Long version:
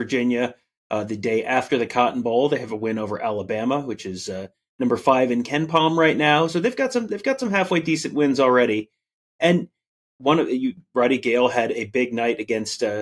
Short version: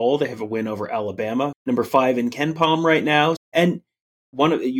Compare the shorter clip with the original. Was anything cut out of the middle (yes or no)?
yes